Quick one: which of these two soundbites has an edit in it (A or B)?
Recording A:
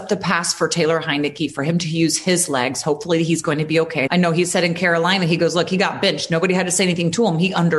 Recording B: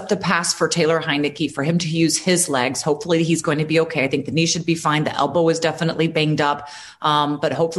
A